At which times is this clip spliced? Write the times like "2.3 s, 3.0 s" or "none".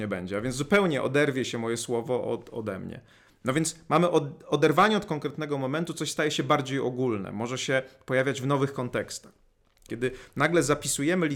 9.9 s